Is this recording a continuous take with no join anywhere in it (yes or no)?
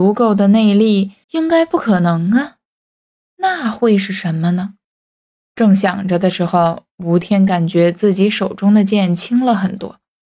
no